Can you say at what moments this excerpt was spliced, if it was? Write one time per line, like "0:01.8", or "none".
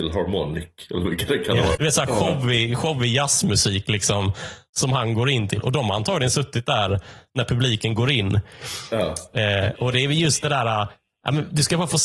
0:01.8